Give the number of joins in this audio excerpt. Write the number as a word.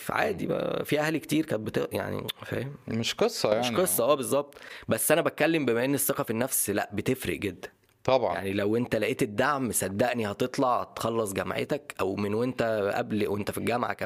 zero